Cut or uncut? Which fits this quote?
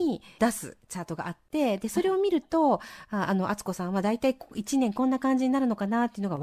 uncut